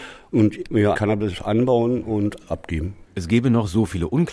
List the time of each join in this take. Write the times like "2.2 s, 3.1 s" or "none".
0.9 s, 3.0 s